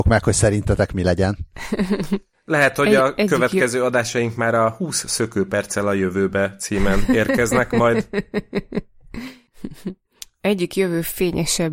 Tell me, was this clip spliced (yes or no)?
no